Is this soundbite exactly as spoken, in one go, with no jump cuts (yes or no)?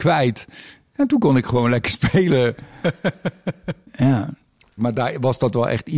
no